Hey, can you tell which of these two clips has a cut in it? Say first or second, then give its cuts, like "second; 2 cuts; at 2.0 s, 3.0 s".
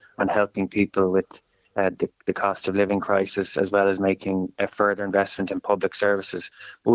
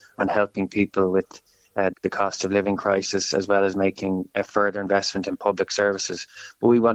second; 1 cut; at 1.9 s